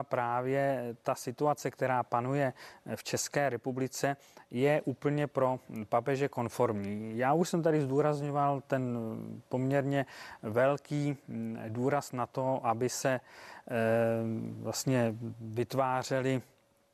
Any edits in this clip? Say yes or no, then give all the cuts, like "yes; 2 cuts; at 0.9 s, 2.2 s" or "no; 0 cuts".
no; 0 cuts